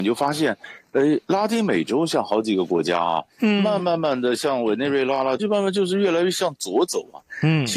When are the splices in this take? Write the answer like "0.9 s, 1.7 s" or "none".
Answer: 3.8 s, 5.4 s

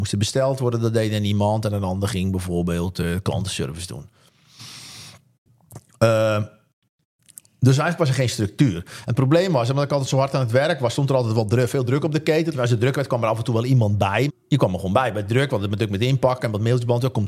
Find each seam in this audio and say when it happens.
12.5 s, 14.3 s

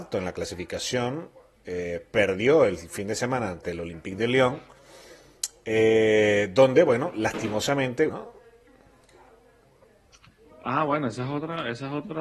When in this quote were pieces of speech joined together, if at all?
8.1 s

